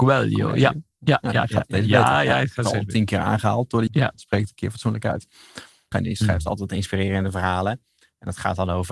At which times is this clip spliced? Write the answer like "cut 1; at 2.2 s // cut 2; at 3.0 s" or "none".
cut 1; at 3.9 s // cut 2; at 5.9 s